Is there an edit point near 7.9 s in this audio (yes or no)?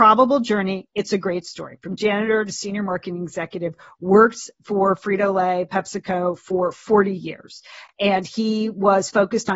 no